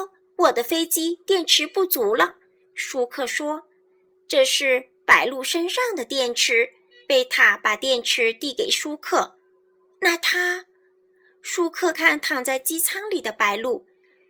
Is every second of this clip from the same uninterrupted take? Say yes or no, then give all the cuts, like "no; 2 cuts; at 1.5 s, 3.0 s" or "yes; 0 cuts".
no; 1 cut; at 11.9 s